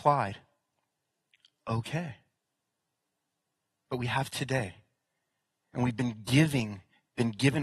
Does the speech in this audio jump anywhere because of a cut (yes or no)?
no